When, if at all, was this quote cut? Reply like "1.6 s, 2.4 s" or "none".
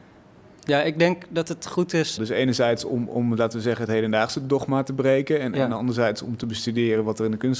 2.2 s